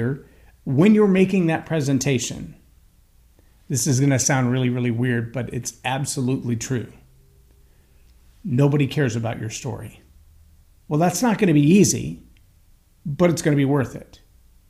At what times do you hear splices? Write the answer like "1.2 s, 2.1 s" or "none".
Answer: 10.8 s